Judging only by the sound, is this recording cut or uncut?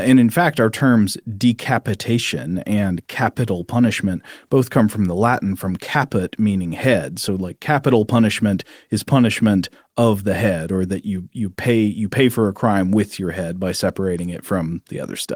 uncut